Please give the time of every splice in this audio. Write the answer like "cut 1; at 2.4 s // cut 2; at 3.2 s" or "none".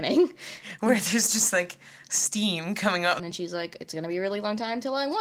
cut 1; at 3.2 s